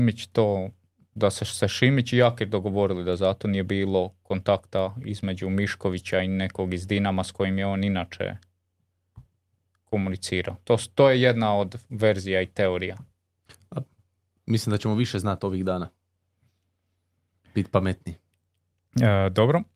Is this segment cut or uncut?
uncut